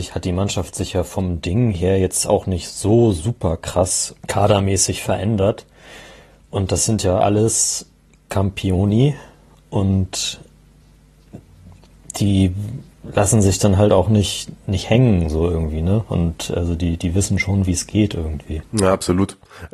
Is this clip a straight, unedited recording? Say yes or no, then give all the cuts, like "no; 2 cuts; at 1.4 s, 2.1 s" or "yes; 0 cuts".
no; 1 cut; at 4.2 s